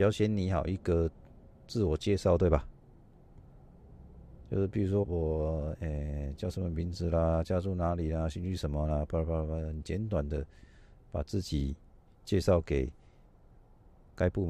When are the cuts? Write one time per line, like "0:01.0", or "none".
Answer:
0:05.0